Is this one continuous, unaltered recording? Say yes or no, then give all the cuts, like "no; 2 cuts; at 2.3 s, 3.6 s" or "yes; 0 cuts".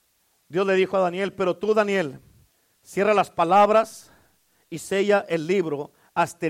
yes; 0 cuts